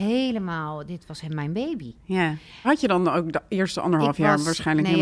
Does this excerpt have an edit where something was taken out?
yes; 1 cut; at 2.6 s

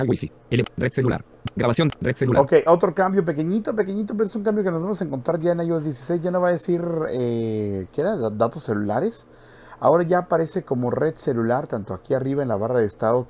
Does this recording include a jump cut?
no; 0 cuts

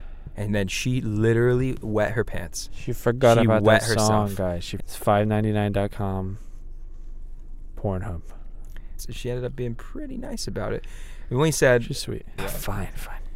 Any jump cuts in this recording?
yes; 3 cuts; at 4.8 s, 9.0 s, 12.4 s

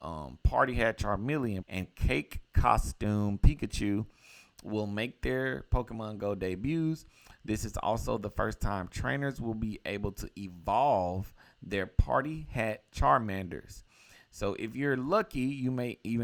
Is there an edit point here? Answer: yes; 1 cut; at 1.6 s

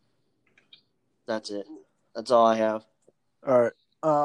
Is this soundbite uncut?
yes; 0 cuts

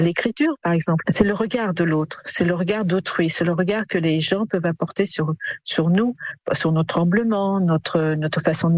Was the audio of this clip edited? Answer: yes; 1 cut; at 1.0 s

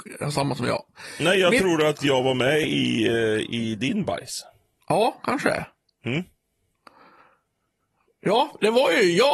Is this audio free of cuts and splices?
yes; 0 cuts

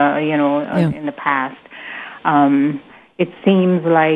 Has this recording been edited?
no; 0 cuts

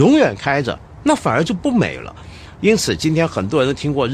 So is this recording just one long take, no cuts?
yes; 0 cuts

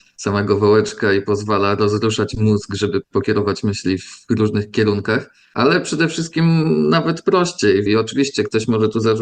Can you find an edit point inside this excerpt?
yes; 1 cut; at 7.9 s

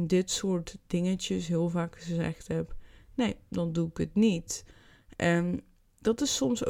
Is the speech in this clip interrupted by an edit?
no; 0 cuts

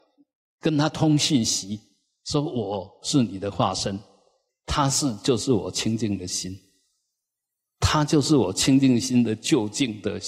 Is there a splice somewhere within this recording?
yes; 1 cut; at 4.5 s

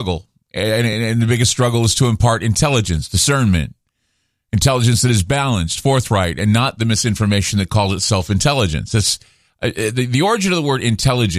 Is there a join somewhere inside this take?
no; 0 cuts

